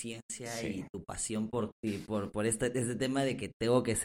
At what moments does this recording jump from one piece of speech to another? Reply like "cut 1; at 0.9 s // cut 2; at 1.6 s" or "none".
cut 1; at 1.7 s